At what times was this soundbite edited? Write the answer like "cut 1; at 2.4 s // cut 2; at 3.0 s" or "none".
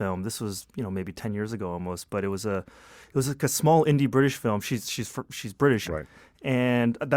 cut 1; at 5.9 s